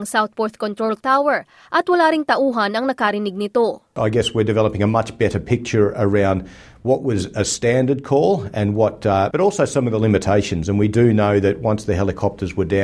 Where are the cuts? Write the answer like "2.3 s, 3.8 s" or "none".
9.3 s